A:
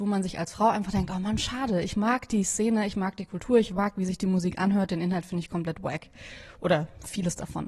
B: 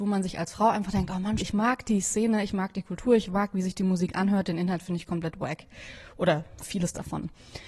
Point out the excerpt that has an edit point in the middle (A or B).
B